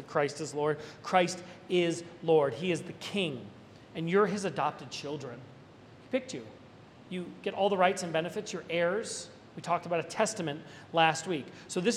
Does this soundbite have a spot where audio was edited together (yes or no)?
no